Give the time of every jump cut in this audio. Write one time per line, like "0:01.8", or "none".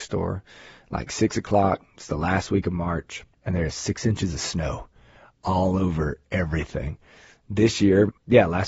0:03.3